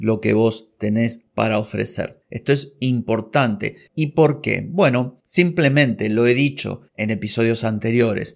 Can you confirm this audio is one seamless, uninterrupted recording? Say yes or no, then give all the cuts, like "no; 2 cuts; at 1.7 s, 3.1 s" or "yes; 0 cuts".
yes; 0 cuts